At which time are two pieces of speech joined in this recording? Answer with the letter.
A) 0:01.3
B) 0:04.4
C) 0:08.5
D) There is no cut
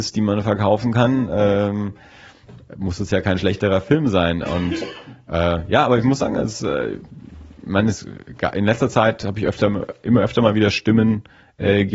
D